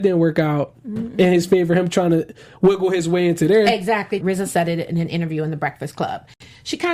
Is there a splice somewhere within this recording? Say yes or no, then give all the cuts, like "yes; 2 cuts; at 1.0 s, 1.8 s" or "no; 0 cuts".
yes; 1 cut; at 4.2 s